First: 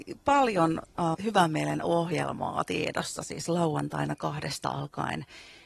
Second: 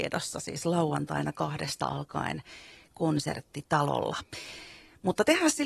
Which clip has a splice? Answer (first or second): first